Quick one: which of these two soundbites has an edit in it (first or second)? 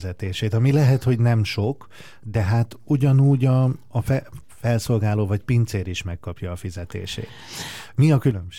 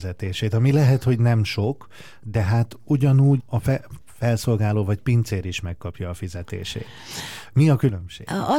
second